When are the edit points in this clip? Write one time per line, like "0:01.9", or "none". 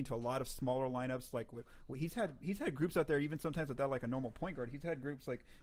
none